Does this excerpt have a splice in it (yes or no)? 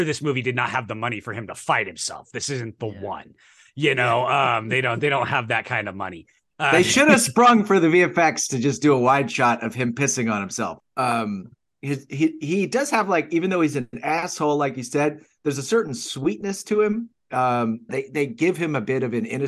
yes